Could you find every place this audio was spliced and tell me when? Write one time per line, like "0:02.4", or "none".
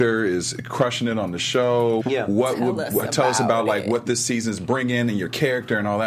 0:02.0